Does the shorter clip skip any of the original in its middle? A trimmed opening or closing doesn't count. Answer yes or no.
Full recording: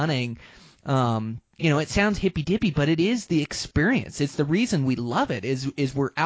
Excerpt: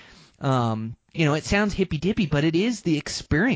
no